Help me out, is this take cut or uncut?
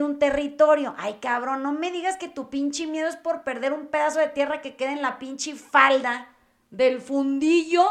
uncut